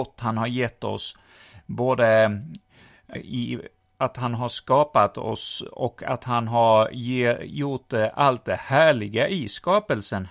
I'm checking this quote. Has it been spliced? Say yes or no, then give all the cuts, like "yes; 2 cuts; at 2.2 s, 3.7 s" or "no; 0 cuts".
yes; 1 cut; at 3.2 s